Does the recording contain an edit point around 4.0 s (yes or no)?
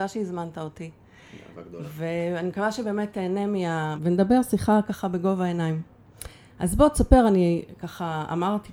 yes